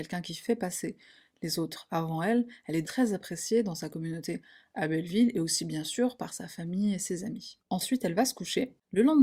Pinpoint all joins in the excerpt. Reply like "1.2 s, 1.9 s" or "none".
2.8 s, 7.6 s

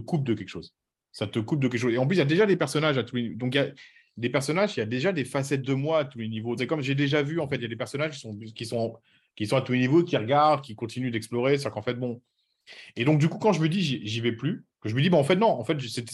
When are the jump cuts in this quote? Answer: 6.6 s

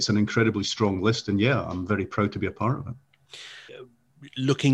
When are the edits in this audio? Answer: 3.7 s

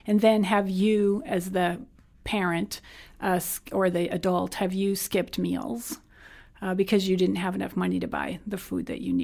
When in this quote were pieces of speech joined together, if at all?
none

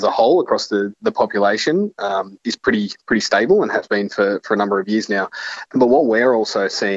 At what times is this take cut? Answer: 5.7 s

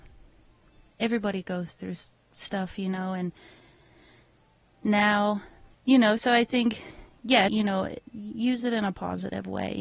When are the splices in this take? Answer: 5.7 s, 7.5 s

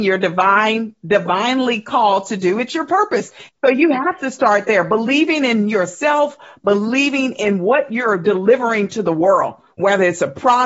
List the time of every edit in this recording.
3.5 s

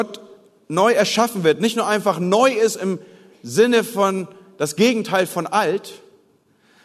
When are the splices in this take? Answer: none

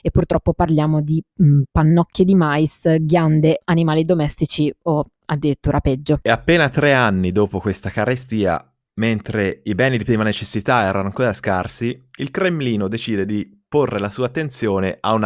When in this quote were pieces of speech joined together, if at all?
3.6 s

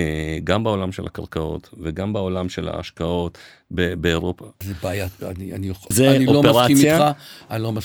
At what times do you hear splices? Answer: 4.6 s, 5.9 s

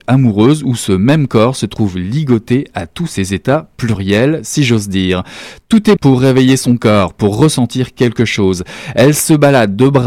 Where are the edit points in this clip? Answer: 6.0 s

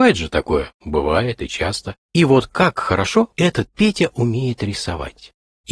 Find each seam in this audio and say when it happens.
2.0 s, 3.3 s

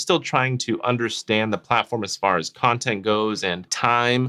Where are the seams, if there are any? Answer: none

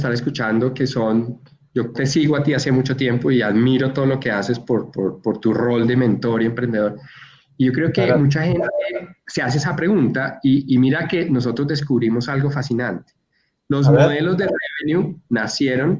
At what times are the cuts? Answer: 1.9 s

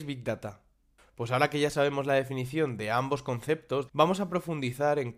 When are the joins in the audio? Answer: 1.0 s, 3.9 s

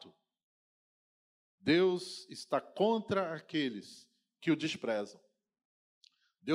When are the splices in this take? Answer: none

